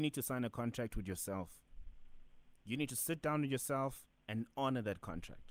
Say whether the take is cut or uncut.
cut